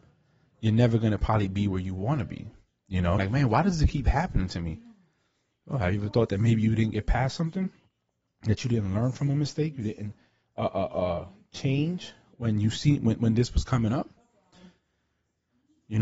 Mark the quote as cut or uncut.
cut